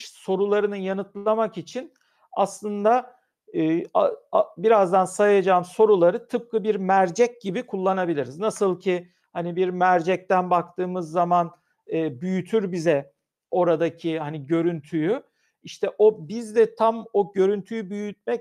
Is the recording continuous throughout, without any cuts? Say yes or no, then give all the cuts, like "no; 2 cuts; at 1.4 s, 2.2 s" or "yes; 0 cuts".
yes; 0 cuts